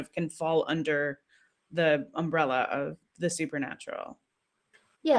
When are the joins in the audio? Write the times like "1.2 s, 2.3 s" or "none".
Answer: none